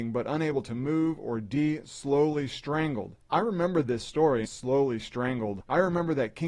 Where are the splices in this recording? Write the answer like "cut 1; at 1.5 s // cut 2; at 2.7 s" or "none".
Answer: cut 1; at 4.4 s

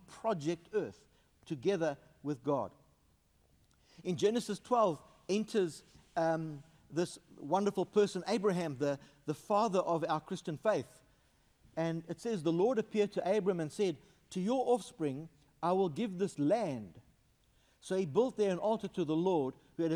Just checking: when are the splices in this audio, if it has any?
none

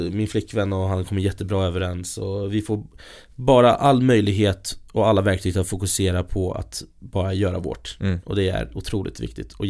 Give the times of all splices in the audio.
none

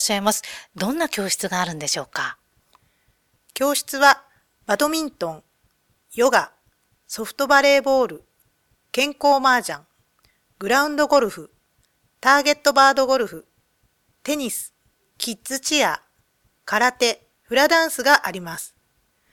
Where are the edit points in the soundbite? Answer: cut 1; at 15.1 s // cut 2; at 17.3 s

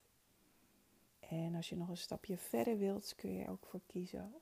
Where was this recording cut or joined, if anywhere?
cut 1; at 1.1 s // cut 2; at 3.5 s

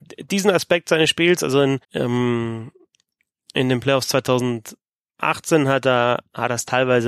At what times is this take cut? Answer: cut 1; at 1.8 s

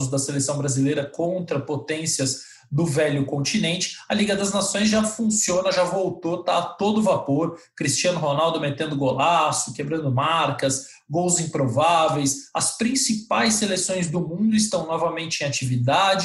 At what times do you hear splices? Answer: none

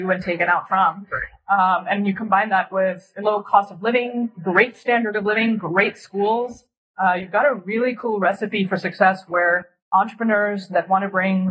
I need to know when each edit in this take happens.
none

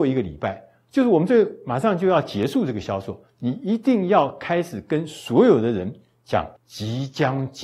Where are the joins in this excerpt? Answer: cut 1; at 6.6 s

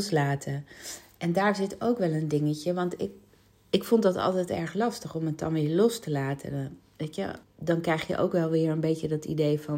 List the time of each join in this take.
cut 1; at 7.4 s

